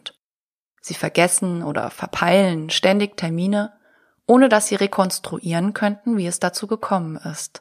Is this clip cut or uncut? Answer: uncut